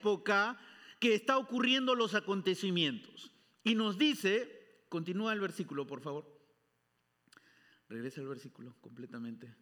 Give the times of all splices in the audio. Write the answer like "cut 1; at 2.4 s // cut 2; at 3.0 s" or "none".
none

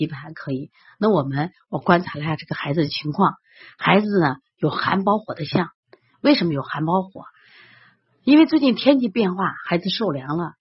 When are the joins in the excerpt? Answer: none

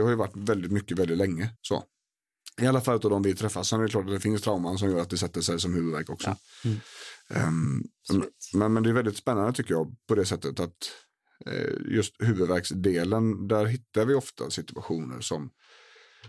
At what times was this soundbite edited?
cut 1; at 1.5 s

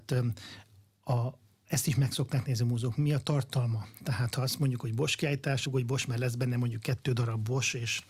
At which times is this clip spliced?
cut 1; at 5.7 s

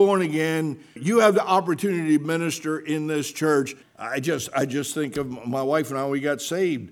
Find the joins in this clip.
cut 1; at 1.0 s // cut 2; at 3.8 s

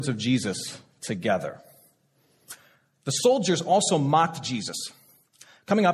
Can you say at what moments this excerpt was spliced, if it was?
none

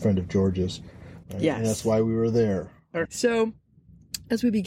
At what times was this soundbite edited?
cut 1; at 1.2 s // cut 2; at 3.1 s

